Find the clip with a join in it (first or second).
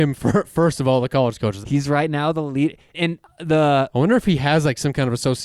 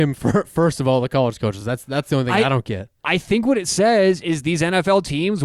first